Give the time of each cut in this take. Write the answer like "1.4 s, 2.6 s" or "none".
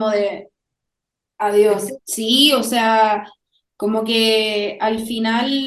2.0 s